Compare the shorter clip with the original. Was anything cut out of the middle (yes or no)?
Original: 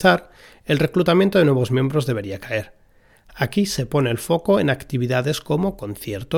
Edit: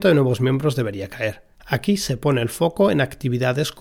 yes